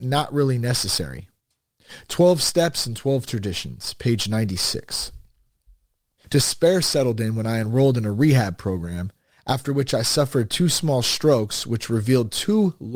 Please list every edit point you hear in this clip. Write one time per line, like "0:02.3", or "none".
0:06.2